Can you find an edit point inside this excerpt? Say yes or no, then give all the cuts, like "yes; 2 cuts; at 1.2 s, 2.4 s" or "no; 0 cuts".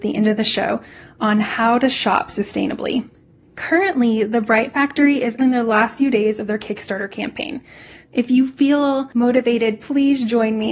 yes; 1 cut; at 5.4 s